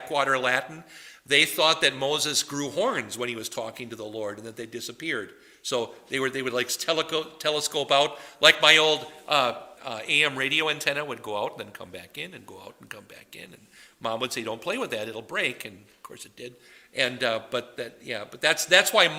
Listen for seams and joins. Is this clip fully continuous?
no; 1 cut; at 9.8 s

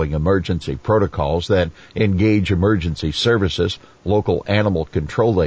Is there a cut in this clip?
no; 0 cuts

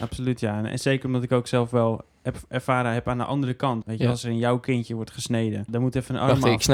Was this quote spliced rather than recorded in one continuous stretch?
yes; 2 cuts; at 3.8 s, 5.7 s

